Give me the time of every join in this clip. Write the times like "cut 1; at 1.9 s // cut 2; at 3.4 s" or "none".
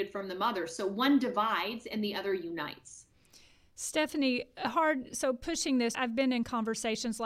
cut 1; at 5.9 s

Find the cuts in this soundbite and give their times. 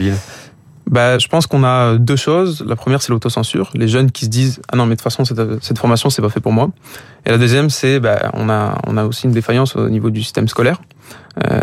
none

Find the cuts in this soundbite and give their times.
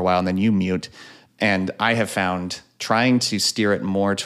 none

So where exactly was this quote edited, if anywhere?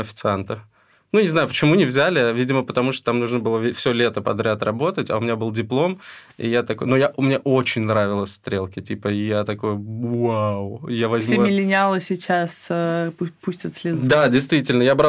none

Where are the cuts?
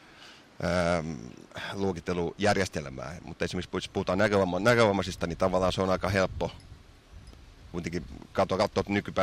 none

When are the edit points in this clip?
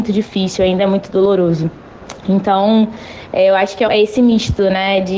cut 1; at 3.9 s

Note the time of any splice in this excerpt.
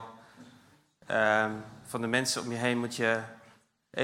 none

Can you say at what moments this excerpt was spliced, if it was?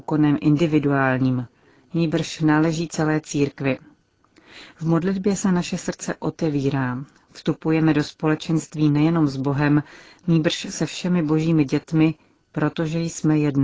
none

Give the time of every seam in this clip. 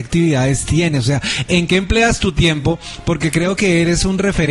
none

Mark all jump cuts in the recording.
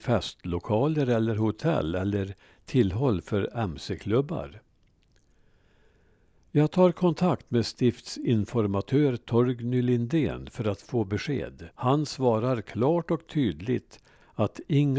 cut 1; at 11.7 s

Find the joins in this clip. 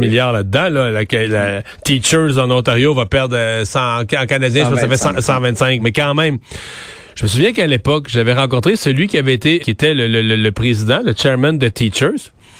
cut 1; at 5.8 s // cut 2; at 9.6 s

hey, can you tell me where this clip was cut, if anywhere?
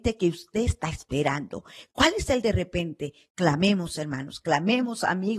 cut 1; at 1.9 s

